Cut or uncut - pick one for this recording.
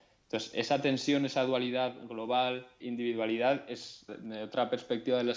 cut